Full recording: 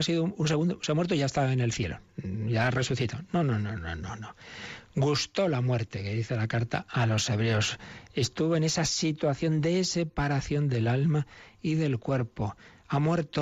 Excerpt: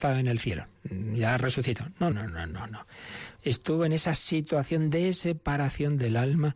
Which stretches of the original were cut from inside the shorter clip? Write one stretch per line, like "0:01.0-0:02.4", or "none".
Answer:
0:03.4-0:03.6
0:04.8-0:08.1